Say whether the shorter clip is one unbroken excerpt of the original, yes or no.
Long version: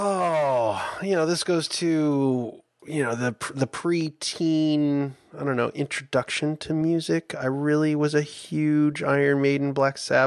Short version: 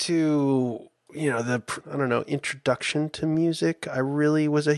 no